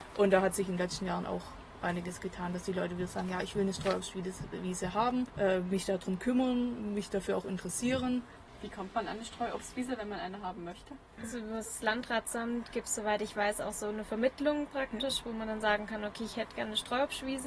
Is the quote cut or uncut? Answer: uncut